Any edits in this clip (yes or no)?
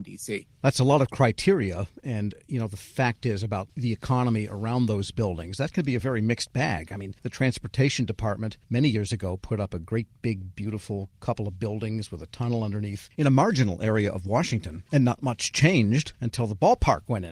no